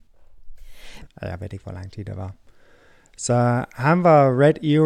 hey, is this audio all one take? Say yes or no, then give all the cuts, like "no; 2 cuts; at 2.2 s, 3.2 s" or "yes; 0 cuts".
no; 1 cut; at 1.1 s